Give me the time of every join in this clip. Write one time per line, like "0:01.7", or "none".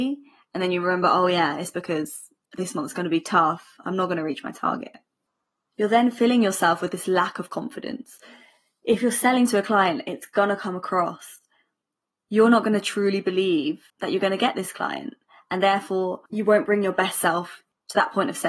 0:13.9
0:16.3